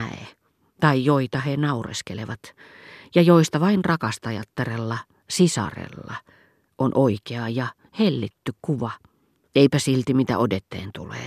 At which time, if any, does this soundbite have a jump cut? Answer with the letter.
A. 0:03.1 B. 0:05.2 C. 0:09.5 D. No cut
C